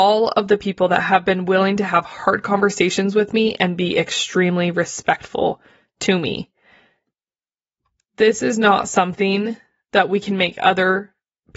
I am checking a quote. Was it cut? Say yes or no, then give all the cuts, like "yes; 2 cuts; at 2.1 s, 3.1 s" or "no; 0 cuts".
no; 0 cuts